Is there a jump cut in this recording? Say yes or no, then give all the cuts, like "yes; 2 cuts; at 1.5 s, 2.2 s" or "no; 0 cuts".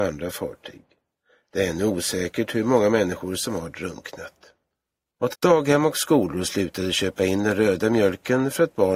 yes; 1 cut; at 5.3 s